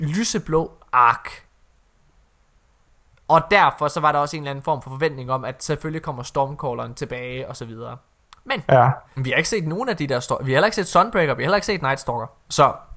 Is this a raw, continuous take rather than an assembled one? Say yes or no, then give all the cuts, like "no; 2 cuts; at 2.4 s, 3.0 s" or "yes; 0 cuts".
no; 1 cut; at 9.2 s